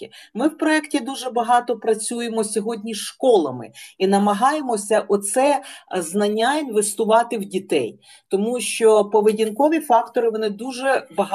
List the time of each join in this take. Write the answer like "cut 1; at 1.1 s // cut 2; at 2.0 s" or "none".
none